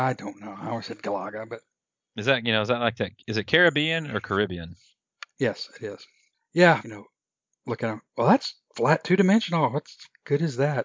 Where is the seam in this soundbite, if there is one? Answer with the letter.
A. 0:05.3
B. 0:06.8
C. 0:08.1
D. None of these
B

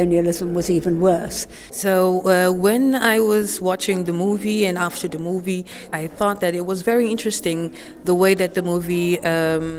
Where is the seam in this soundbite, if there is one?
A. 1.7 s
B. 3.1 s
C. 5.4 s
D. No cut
A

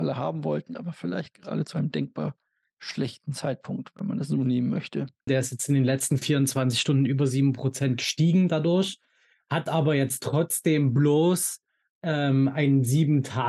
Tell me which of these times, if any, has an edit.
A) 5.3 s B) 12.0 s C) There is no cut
A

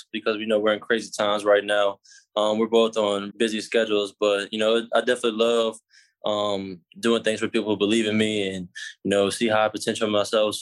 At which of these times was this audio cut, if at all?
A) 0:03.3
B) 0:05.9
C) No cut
A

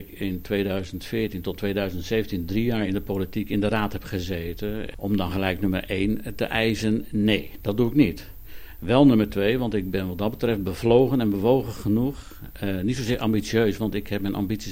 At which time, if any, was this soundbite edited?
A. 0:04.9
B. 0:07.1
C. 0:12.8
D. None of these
A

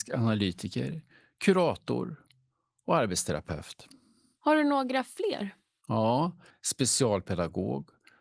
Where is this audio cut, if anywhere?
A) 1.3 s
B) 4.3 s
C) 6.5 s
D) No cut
C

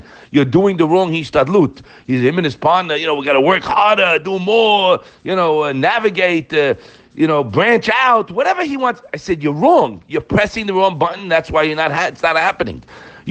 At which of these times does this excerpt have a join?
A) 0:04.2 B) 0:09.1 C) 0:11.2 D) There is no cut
D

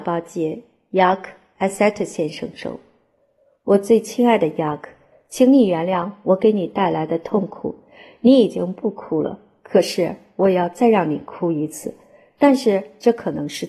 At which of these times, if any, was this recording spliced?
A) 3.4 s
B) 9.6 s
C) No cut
C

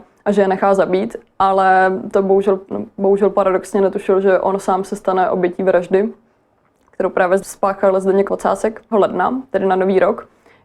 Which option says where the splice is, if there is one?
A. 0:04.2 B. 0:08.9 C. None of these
B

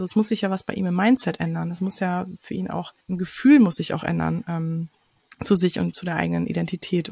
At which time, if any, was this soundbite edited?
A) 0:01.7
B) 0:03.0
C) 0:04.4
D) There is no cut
B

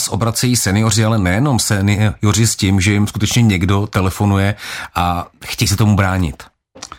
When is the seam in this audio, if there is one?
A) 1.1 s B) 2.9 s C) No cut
C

